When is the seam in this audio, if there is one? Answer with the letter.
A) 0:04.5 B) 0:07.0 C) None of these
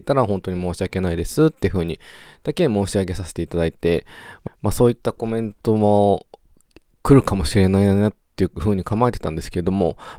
A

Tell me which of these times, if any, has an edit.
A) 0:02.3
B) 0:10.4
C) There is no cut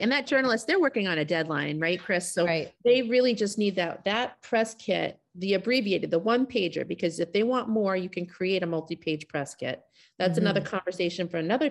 C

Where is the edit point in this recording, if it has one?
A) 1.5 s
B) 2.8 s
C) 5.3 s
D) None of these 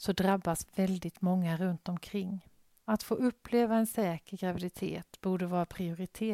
B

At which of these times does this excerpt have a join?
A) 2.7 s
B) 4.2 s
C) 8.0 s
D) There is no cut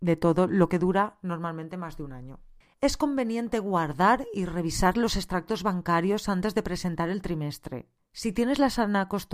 A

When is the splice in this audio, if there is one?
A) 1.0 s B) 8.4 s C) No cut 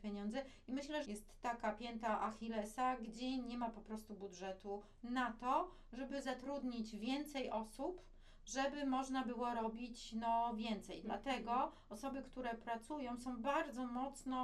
A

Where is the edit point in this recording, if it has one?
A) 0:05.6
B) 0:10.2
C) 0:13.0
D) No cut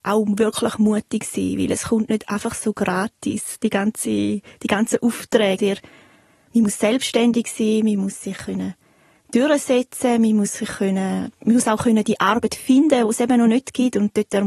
A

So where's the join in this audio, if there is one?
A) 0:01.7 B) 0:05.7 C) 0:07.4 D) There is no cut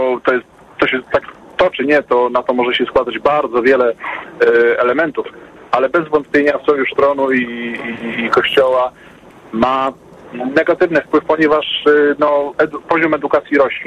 A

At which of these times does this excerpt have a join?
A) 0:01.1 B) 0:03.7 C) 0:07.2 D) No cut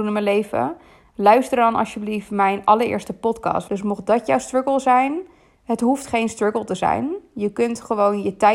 B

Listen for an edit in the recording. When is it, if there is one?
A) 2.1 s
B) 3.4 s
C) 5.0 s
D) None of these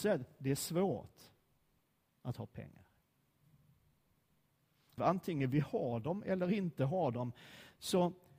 C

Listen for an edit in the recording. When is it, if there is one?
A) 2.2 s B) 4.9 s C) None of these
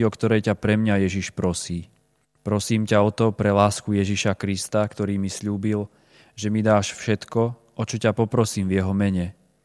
A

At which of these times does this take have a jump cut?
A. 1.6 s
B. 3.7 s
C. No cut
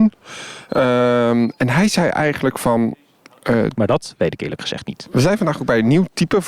B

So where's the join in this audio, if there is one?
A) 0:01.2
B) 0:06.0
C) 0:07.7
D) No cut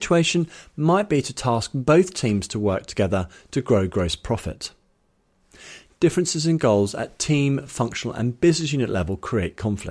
D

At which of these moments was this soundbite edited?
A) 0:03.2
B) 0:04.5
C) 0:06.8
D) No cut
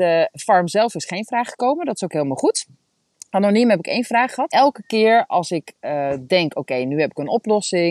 B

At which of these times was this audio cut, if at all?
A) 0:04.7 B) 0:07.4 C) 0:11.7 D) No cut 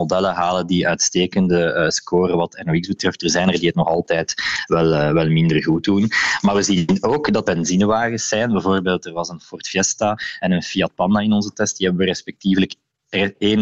B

